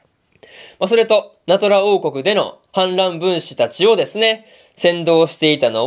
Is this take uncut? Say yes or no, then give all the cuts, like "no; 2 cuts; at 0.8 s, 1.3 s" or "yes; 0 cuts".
yes; 0 cuts